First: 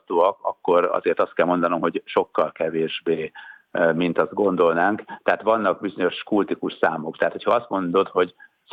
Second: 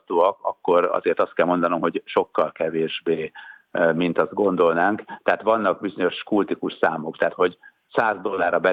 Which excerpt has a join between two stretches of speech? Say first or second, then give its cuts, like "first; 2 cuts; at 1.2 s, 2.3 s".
second; 1 cut; at 7.3 s